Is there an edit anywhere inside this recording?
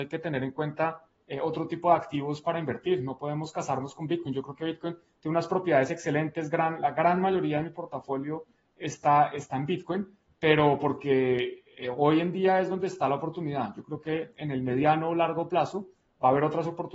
no; 0 cuts

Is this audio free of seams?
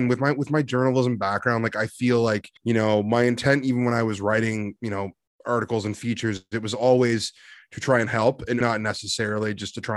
no; 2 cuts; at 2.6 s, 8.6 s

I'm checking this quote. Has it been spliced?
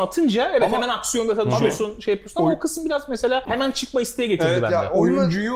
no; 0 cuts

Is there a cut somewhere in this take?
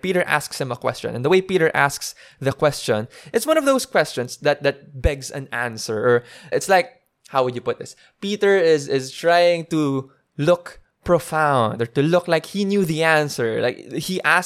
yes; 1 cut; at 6.5 s

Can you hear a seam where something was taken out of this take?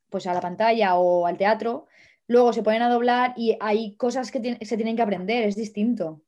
no; 0 cuts

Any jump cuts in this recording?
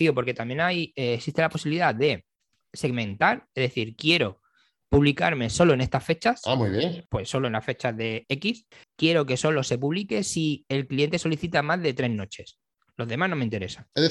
yes; 1 cut; at 8.8 s

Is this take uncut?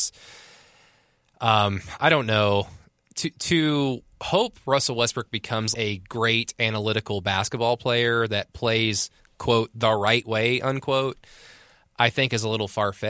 no; 2 cuts; at 2.0 s, 5.7 s

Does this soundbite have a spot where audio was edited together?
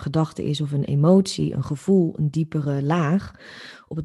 no; 0 cuts

